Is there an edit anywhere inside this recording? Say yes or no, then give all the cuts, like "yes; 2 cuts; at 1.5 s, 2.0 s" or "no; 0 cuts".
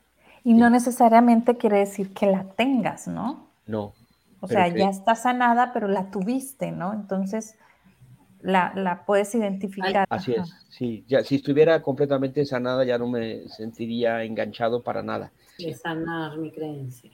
yes; 2 cuts; at 10.0 s, 15.6 s